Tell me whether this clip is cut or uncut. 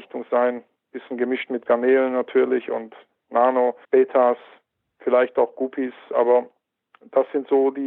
cut